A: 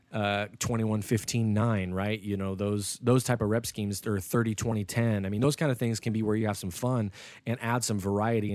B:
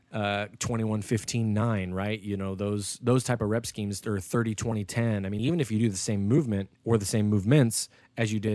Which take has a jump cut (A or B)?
B